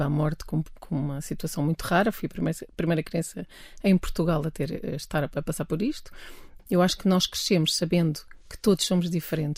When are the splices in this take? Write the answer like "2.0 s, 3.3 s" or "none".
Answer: 6.6 s